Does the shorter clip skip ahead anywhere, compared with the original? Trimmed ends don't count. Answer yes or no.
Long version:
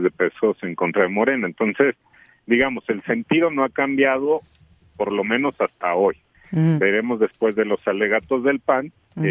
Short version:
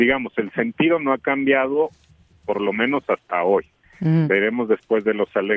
no